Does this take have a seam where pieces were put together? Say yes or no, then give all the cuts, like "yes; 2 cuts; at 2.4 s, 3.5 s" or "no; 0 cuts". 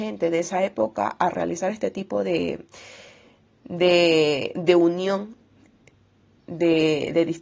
no; 0 cuts